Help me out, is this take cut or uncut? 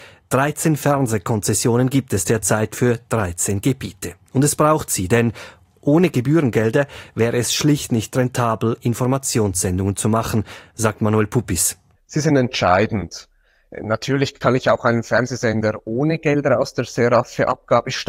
uncut